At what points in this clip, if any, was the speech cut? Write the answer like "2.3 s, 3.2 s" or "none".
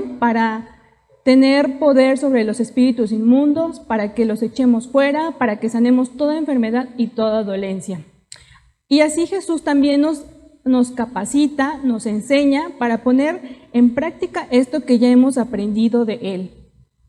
none